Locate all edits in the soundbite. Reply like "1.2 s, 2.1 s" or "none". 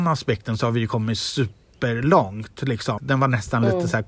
3.0 s